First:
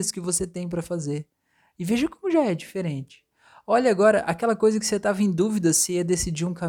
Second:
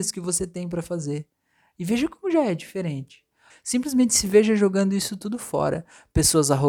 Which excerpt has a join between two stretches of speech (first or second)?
second